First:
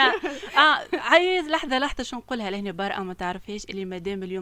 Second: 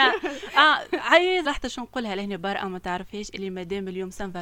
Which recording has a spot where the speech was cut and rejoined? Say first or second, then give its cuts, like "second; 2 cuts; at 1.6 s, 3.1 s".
second; 1 cut; at 1.5 s